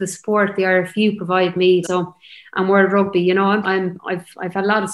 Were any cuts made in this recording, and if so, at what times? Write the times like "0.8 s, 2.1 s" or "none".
1.8 s, 3.6 s